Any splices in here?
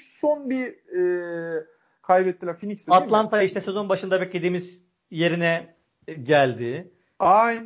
no; 0 cuts

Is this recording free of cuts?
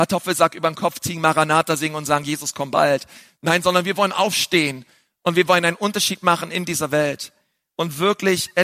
yes; 0 cuts

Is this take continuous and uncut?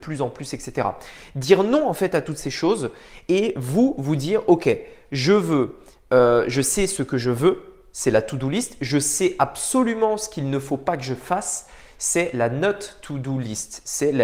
yes; 0 cuts

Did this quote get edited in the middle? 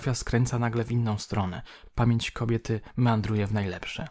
no; 0 cuts

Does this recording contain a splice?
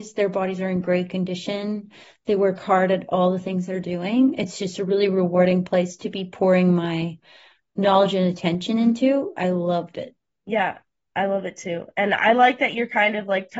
no; 0 cuts

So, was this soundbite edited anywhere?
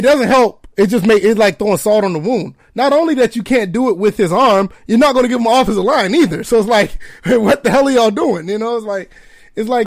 no; 0 cuts

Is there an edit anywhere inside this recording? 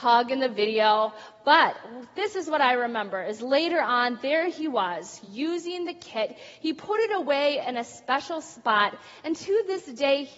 no; 0 cuts

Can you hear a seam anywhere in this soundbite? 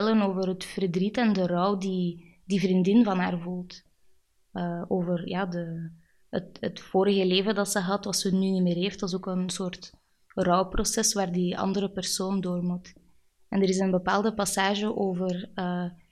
no; 0 cuts

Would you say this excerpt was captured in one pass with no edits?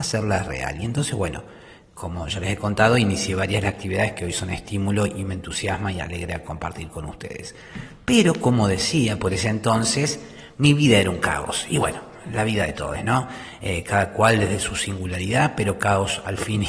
yes; 0 cuts

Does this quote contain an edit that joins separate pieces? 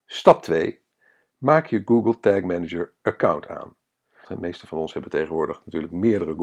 yes; 1 cut; at 4.2 s

